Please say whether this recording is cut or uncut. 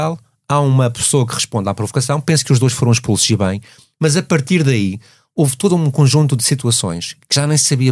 uncut